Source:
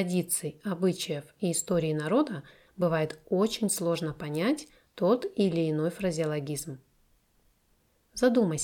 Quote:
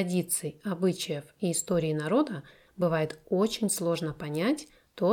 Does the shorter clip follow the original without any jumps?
yes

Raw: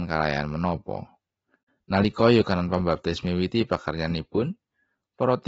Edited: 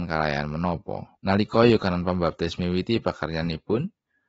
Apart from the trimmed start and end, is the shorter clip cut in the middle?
yes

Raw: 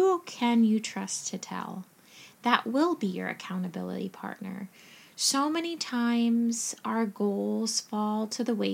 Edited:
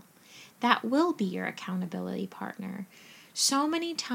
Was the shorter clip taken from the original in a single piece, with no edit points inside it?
yes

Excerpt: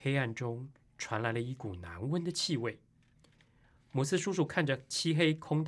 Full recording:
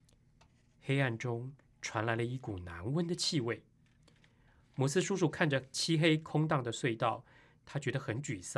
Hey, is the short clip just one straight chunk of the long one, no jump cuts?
yes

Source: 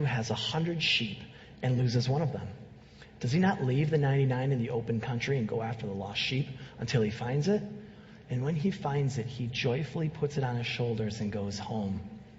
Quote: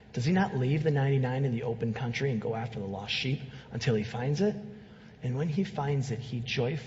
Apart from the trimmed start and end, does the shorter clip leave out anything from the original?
no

